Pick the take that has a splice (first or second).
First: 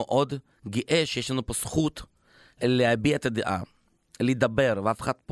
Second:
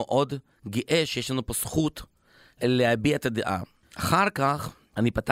second